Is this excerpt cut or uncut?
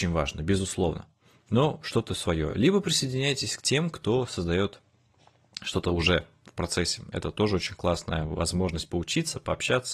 uncut